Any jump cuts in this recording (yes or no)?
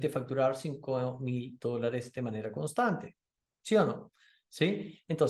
no